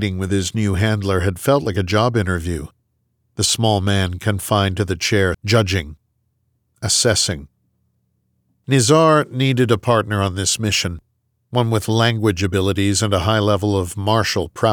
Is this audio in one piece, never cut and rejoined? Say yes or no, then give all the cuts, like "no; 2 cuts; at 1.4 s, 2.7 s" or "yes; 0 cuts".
no; 1 cut; at 5.3 s